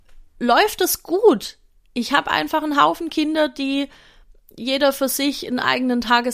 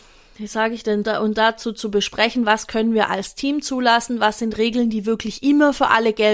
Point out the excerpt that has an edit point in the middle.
second; 1 cut; at 1.0 s

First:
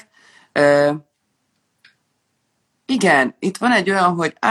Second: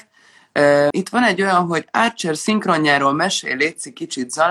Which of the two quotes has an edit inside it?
second; 1 cut; at 0.9 s

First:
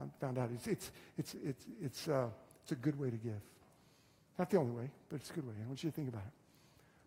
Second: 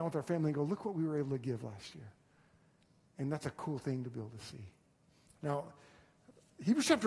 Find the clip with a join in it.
second; 1 cut; at 5.3 s

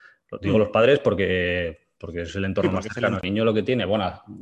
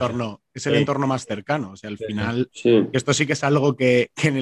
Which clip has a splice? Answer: first; 1 cut; at 3.2 s

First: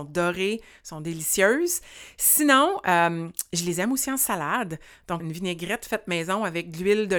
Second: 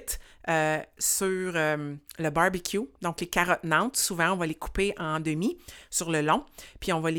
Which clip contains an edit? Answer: first; 1 cut; at 5.2 s

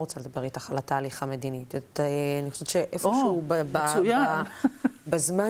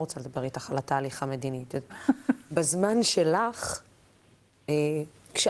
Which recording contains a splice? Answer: second; 1 cut; at 1.9 s

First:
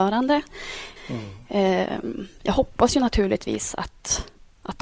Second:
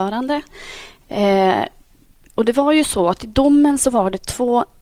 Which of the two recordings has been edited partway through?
first; 1 cut; at 1.0 s

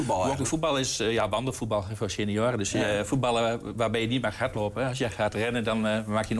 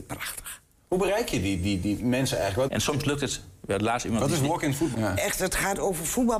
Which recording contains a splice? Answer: second; 2 cuts; at 2.7 s, 4.9 s

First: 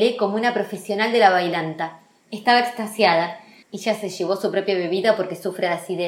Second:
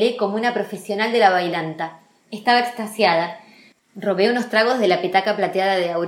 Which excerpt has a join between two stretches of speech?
first; 1 cut; at 3.6 s

